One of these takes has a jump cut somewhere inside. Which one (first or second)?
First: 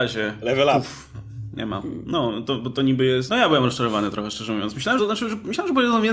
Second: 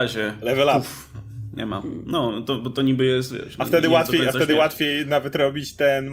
first